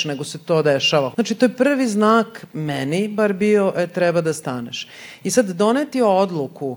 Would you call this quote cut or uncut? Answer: cut